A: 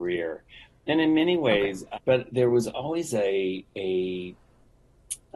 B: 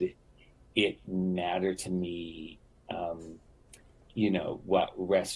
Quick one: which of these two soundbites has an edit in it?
A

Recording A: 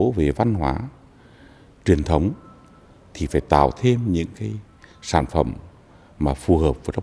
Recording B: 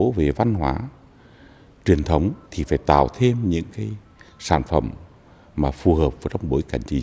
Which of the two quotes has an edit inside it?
B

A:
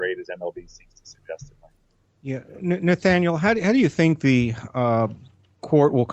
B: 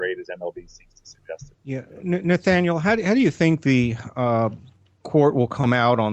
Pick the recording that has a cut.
B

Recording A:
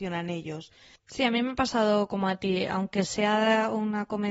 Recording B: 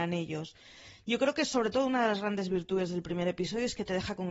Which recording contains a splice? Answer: A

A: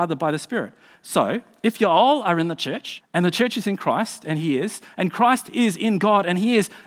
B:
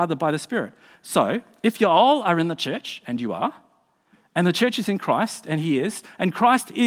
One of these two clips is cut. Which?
A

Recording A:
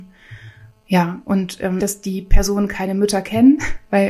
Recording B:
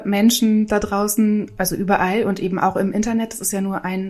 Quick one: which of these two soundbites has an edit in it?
A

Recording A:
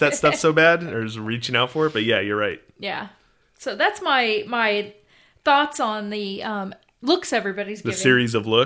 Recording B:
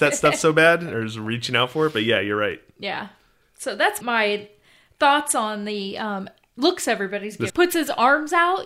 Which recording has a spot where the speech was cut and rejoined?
B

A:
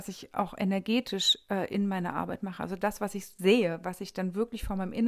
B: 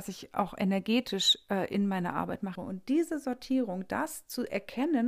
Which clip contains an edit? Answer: B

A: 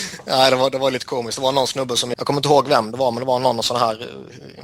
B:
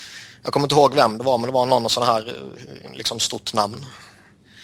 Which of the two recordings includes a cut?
A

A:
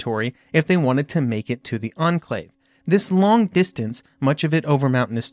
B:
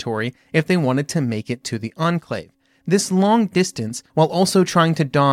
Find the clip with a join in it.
B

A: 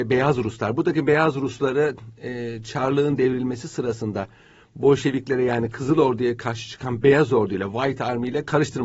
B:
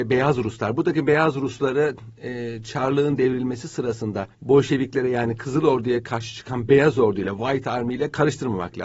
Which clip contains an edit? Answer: B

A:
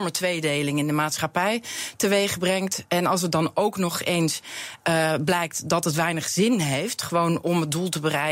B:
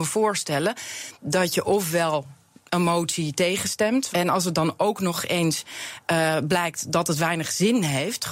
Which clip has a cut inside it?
B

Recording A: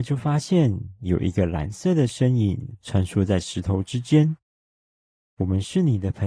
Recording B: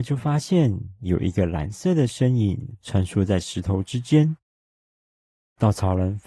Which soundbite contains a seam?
A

